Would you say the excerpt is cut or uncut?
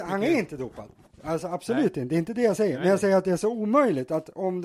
uncut